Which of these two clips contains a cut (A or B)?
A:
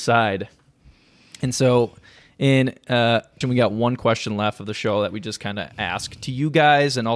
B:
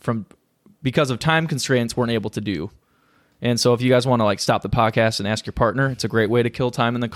A